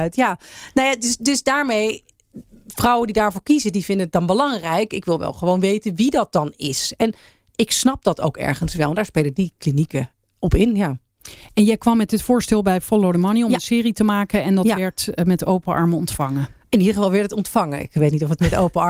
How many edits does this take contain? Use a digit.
0